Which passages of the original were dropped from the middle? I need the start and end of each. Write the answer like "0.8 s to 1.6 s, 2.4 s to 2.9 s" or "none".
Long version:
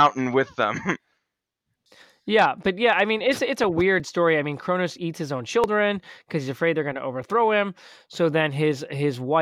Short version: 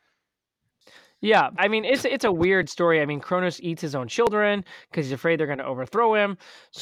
2.6 s to 2.9 s